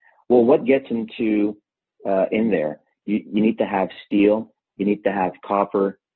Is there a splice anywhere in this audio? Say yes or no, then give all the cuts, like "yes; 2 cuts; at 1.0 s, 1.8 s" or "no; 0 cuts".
no; 0 cuts